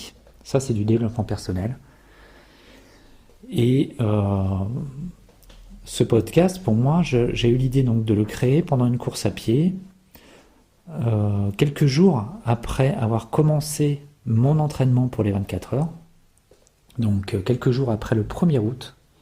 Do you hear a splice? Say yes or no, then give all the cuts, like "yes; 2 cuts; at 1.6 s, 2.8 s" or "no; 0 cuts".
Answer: no; 0 cuts